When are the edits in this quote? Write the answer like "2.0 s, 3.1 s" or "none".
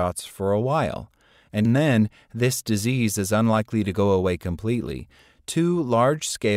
1.7 s